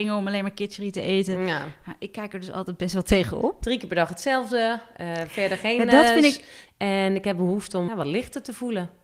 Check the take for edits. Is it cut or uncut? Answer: cut